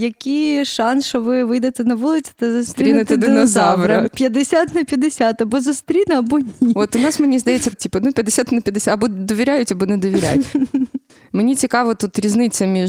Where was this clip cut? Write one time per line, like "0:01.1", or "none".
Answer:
0:07.7